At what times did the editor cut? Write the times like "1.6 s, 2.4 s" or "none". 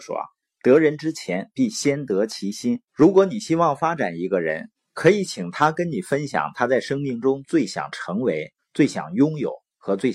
2.9 s, 4.8 s, 8.6 s

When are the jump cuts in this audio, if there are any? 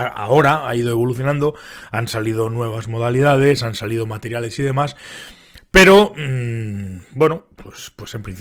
none

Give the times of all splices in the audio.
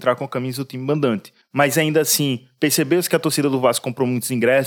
none

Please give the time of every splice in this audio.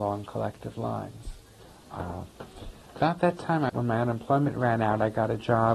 3.7 s

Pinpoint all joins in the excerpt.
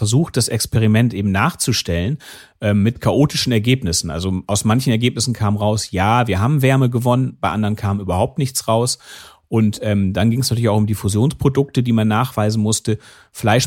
none

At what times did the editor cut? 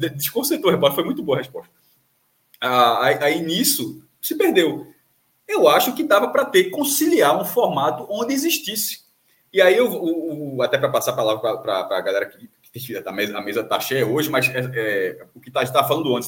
none

